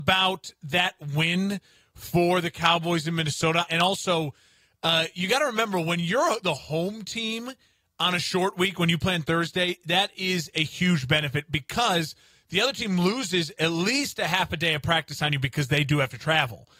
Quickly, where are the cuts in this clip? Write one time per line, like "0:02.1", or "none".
0:03.7